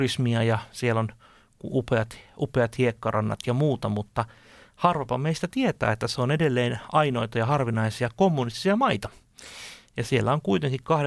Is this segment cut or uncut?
uncut